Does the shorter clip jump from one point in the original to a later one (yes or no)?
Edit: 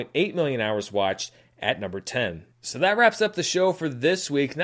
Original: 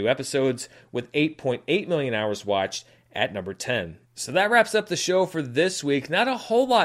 no